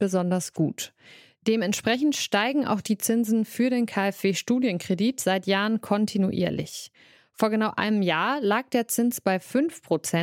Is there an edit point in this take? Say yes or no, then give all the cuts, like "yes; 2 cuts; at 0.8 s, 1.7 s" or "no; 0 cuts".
no; 0 cuts